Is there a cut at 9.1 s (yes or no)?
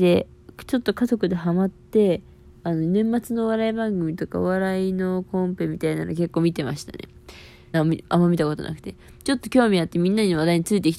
no